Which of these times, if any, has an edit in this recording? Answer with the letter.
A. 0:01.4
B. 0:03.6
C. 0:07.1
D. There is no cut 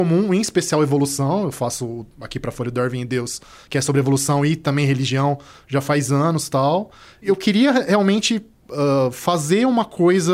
D